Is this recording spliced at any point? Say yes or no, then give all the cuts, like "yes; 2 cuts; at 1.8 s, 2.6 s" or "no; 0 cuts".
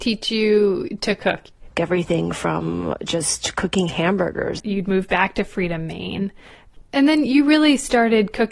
yes; 3 cuts; at 1.7 s, 4.6 s, 6.8 s